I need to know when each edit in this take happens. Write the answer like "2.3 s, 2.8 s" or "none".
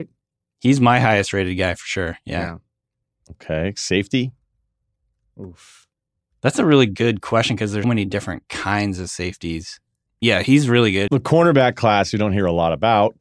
7.8 s, 10.1 s, 11.1 s